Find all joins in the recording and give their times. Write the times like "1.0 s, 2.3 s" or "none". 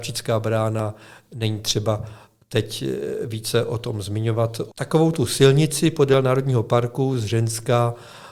4.7 s

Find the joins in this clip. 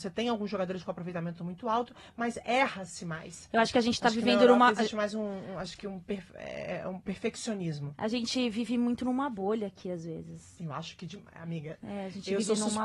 none

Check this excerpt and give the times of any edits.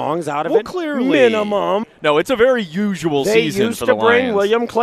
1.8 s

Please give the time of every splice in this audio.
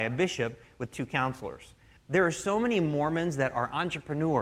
2.0 s

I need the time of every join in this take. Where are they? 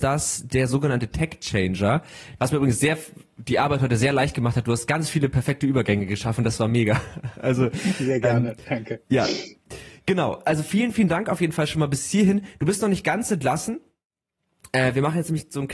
2.4 s

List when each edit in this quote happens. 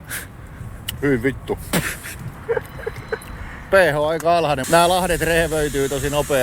4.6 s

